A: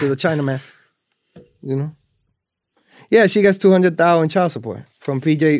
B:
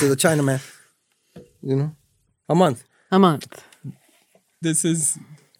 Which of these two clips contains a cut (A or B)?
B